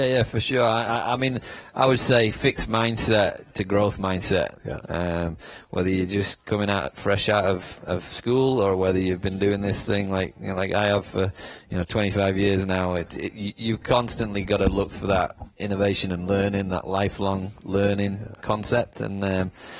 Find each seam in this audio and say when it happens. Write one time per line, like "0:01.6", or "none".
0:04.6